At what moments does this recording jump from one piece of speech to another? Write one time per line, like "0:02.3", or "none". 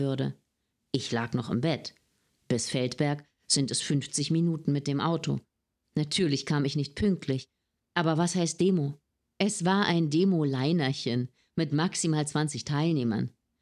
0:07.8